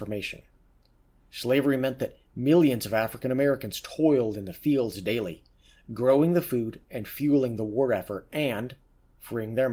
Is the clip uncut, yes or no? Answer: no